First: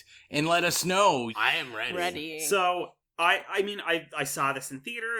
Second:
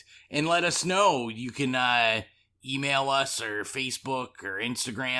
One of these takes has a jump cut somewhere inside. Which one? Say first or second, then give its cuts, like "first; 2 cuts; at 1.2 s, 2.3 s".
first; 1 cut; at 1.3 s